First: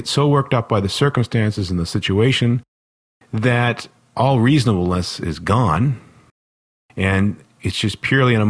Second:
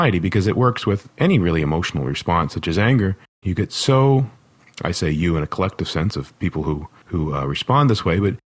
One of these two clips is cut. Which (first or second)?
second